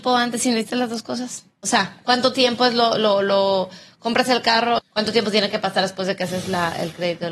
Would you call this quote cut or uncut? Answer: cut